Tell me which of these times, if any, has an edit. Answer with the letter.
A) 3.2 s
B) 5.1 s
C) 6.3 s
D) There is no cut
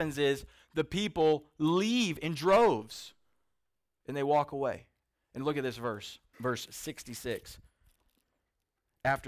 C